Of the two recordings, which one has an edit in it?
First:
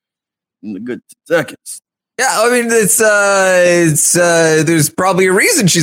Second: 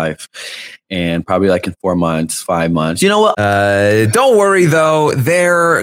second; 1 cut; at 3.3 s

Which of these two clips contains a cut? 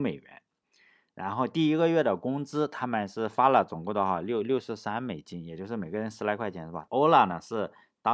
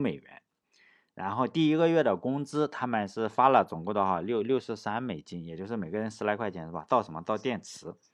first; 1 cut; at 6.9 s

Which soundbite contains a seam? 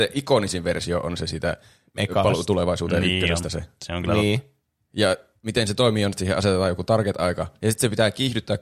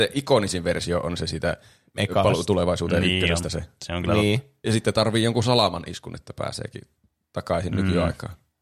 second; 1 cut; at 4.6 s

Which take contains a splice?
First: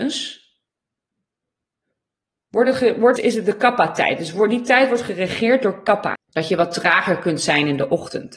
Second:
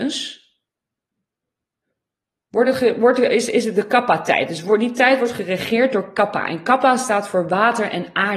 first; 2 cuts; at 3.2 s, 6.1 s

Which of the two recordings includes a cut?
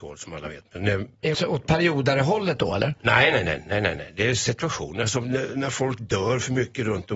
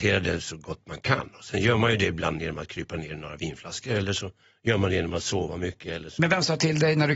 first; 1 cut; at 1.3 s

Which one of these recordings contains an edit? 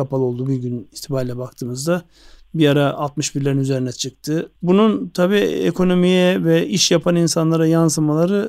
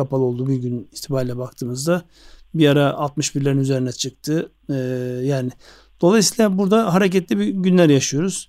first; 1 cut; at 4.6 s

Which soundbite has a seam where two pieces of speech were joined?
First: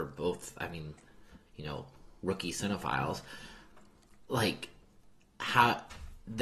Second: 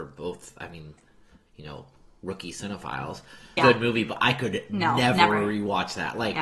second; 1 cut; at 3.6 s

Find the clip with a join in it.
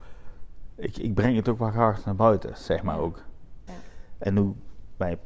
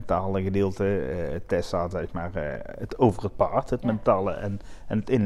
first; 1 cut; at 3.7 s

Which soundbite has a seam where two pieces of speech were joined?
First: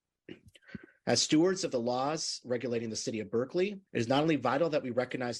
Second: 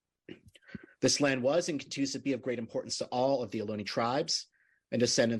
first; 2 cuts; at 0.9 s, 3.9 s

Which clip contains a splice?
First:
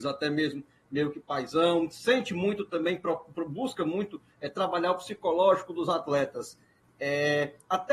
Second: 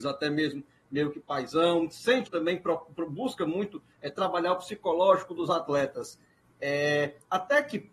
second; 1 cut; at 2.3 s

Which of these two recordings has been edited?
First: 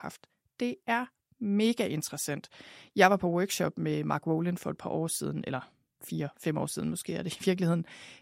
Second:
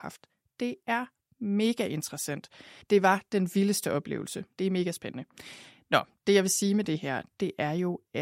second; 2 cuts; at 2.8 s, 4.6 s

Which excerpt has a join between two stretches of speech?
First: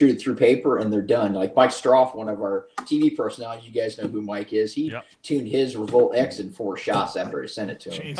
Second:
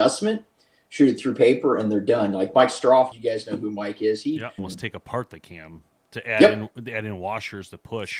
second; 2 cuts; at 3.1 s, 4.6 s

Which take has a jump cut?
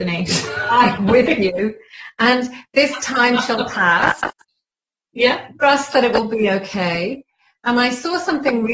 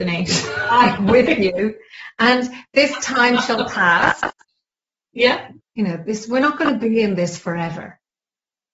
second; 1 cut; at 5.6 s

